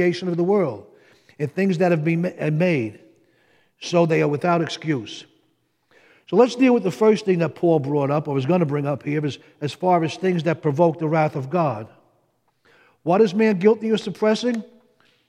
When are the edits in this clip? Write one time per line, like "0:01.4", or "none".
none

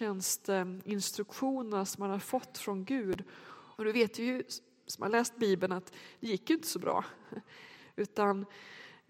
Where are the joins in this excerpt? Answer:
0:03.7

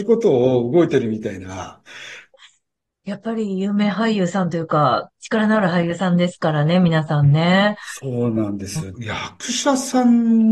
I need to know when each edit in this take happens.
0:02.3
0:08.9

